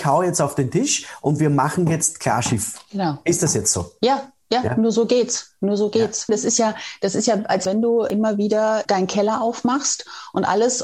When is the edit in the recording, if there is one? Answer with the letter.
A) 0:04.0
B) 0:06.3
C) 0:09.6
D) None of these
B